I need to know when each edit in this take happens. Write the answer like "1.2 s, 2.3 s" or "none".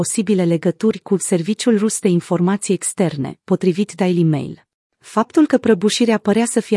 4.9 s